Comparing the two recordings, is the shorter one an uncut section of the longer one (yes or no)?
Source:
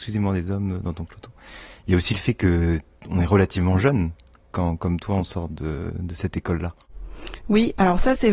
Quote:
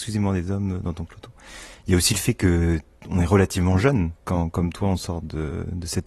no